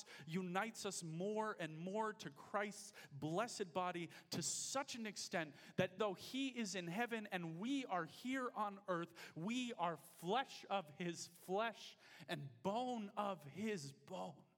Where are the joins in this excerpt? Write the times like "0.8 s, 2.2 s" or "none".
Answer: 6.0 s